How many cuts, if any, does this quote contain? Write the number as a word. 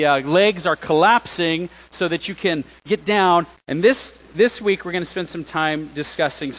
one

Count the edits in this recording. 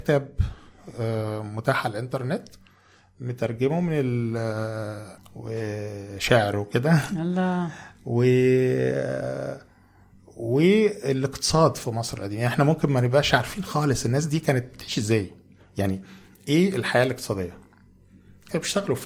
one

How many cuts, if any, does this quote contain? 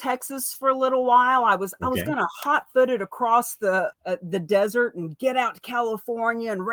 one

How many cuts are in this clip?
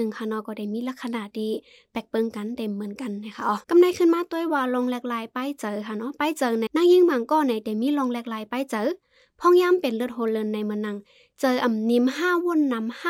two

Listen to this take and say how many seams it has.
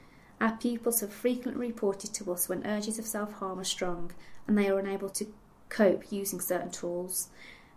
one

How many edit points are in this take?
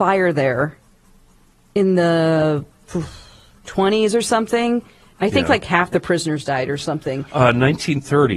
zero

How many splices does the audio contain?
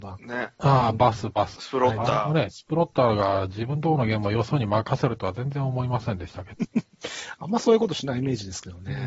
two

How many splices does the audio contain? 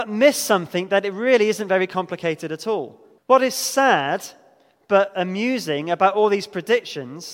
one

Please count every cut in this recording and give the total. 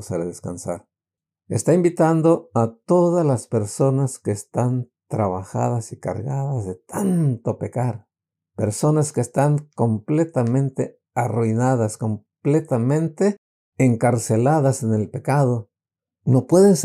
zero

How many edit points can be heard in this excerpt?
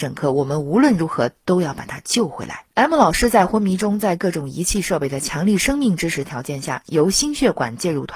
one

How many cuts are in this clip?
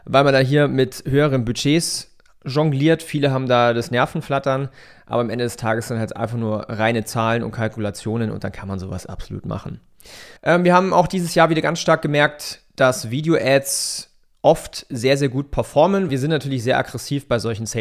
two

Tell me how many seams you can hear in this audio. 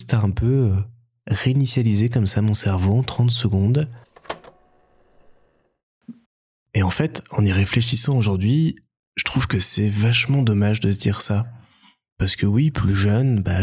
one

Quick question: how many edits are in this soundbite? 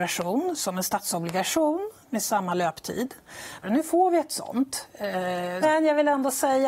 two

